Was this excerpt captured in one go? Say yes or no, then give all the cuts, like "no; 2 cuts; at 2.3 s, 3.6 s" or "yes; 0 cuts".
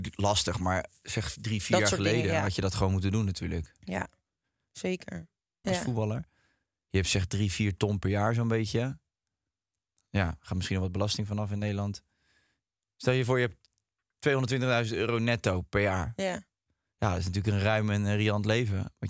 no; 1 cut; at 5.6 s